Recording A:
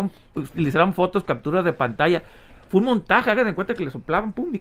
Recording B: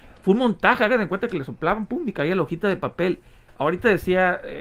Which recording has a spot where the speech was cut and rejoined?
B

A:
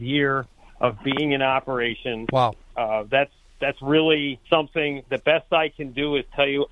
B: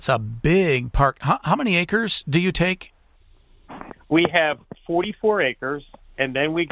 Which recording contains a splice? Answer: A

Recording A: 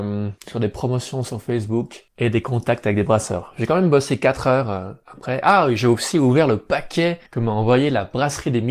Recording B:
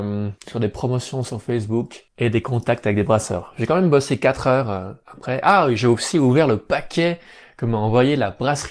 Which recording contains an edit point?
A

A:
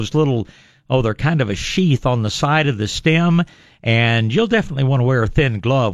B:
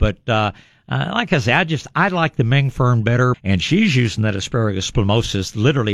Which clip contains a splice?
B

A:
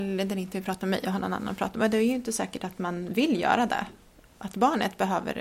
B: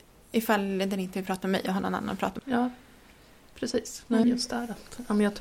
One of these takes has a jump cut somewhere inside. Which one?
B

